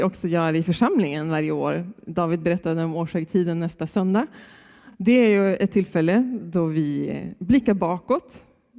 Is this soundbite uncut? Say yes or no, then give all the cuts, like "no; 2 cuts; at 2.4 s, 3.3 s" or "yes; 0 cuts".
yes; 0 cuts